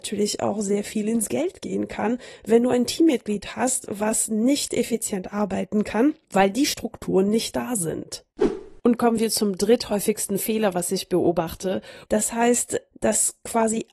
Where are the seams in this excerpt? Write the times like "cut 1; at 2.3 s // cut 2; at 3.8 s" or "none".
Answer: cut 1; at 12.0 s